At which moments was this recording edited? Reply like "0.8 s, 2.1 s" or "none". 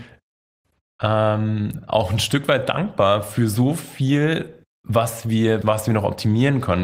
5.6 s